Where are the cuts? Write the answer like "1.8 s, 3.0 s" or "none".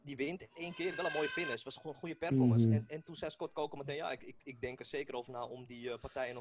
none